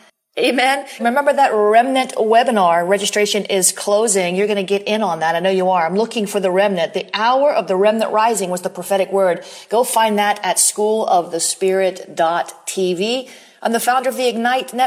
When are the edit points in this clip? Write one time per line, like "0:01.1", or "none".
0:01.0

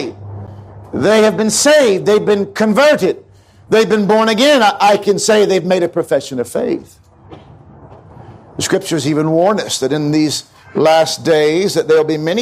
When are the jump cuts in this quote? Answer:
none

